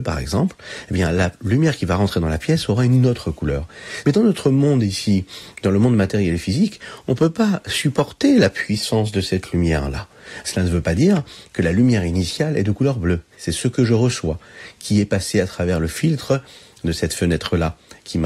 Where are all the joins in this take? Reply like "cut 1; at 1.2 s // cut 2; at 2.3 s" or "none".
cut 1; at 4.0 s // cut 2; at 10.4 s // cut 3; at 13.3 s